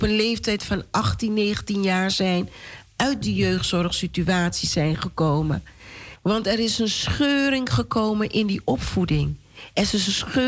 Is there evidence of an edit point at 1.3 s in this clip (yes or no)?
no